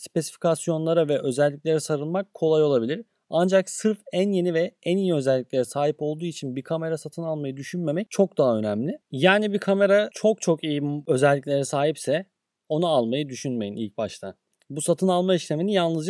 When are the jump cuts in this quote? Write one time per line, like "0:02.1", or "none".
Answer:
none